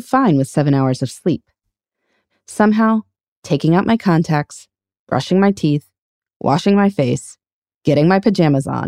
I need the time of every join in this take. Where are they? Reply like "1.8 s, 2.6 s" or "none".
2.3 s